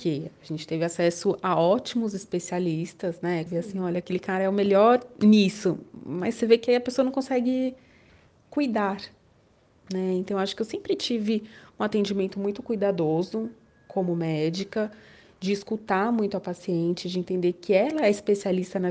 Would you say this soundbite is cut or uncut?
cut